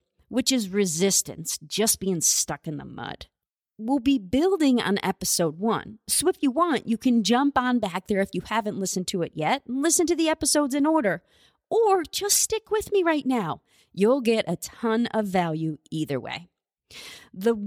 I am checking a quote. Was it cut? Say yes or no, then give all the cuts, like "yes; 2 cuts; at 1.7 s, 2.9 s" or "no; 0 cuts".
no; 0 cuts